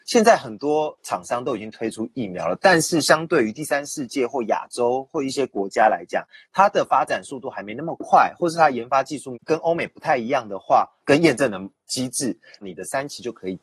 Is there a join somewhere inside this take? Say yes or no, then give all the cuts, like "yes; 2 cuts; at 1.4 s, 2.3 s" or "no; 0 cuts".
yes; 2 cuts; at 11.0 s, 12.6 s